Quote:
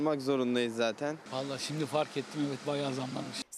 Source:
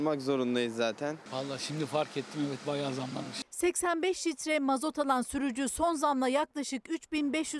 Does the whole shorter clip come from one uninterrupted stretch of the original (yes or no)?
yes